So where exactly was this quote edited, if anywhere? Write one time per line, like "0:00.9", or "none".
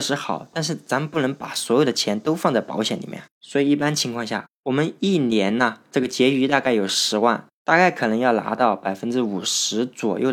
none